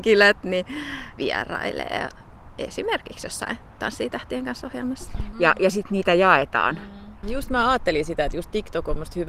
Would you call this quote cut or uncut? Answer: cut